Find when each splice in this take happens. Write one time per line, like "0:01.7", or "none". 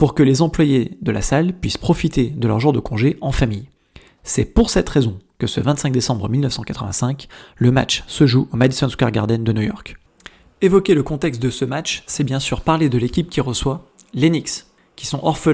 none

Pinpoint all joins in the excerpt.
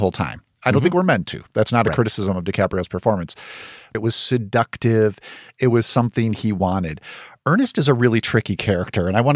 0:03.9

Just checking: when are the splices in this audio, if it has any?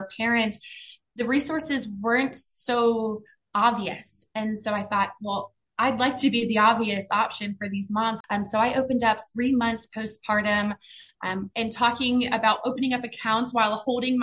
0:11.5

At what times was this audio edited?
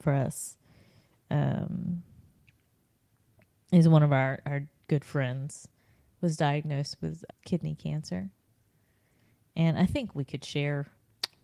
0:07.3

